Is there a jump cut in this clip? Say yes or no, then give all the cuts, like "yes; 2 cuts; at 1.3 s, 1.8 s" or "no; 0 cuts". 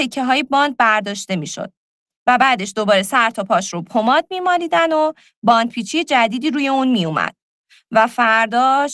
no; 0 cuts